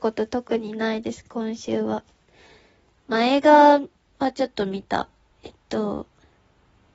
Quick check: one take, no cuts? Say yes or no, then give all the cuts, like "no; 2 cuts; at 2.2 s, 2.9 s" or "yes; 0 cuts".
yes; 0 cuts